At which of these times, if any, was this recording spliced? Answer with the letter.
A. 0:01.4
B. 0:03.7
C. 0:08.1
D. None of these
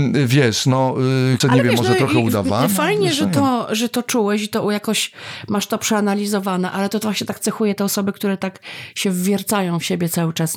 A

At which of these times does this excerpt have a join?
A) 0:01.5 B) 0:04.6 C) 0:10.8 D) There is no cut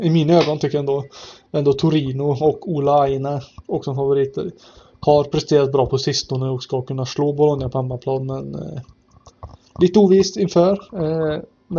A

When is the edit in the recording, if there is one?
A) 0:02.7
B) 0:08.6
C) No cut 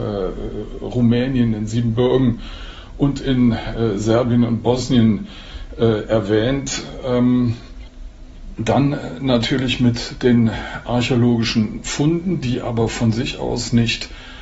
B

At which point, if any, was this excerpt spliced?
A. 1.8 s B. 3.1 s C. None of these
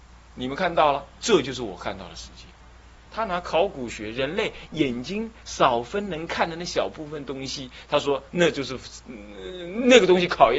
B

